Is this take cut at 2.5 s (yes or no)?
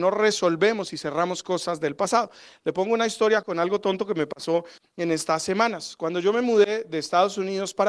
no